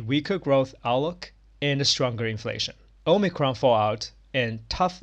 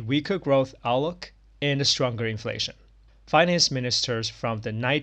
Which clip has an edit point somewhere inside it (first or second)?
first